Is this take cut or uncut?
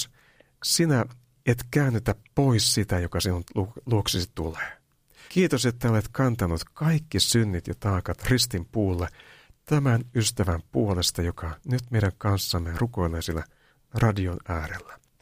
cut